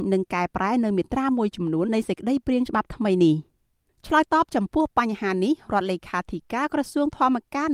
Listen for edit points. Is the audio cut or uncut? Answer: cut